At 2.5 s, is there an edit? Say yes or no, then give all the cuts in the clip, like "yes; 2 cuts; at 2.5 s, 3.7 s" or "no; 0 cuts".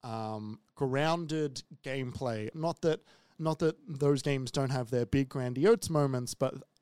yes; 1 cut; at 2.5 s